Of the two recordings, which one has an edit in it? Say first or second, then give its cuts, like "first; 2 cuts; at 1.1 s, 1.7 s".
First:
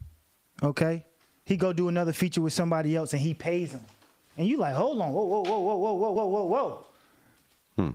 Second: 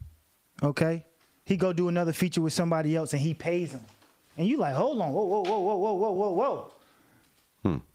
second; 1 cut; at 6.2 s